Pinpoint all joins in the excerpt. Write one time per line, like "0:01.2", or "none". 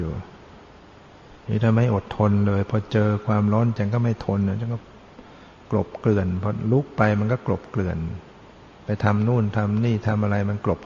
0:01.4
0:03.8
0:08.7